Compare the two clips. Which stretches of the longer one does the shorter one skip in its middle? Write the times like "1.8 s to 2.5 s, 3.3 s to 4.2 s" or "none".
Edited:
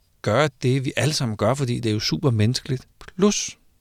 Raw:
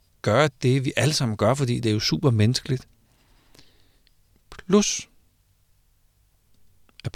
2.9 s to 4.4 s